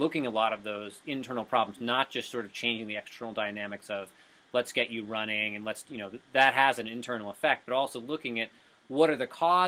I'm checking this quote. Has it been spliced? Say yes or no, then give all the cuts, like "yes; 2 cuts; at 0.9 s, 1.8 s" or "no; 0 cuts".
no; 0 cuts